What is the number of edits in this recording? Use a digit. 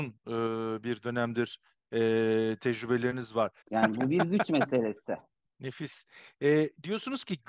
2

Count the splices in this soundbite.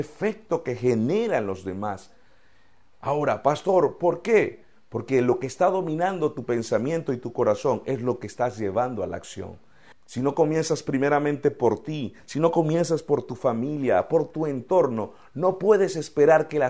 1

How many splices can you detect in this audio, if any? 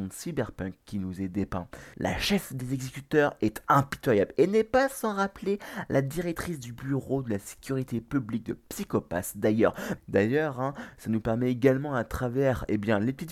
2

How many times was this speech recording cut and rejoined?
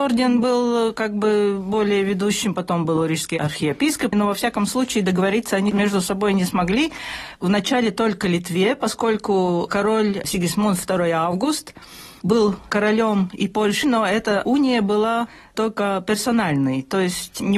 3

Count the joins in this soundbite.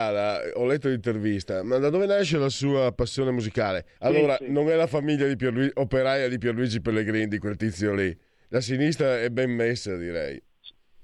1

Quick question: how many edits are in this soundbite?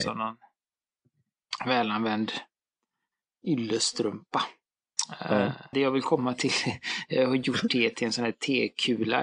1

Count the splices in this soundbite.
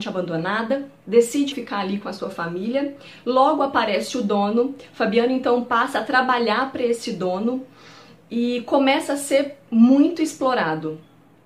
1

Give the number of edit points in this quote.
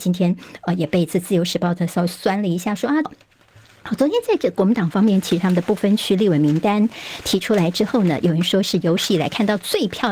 1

